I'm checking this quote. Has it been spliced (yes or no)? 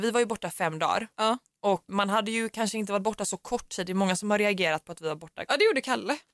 yes